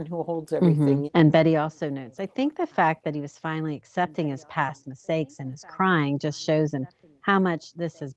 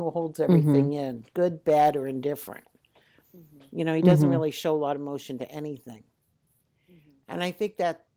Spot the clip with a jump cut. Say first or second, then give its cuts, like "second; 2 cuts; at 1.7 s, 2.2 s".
first; 1 cut; at 1.1 s